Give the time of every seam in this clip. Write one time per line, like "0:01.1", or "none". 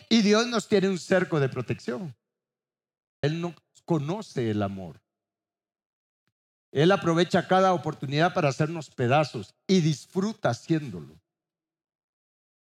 0:03.2